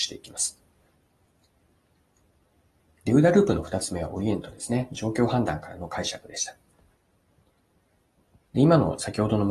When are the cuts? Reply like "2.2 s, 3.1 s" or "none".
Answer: none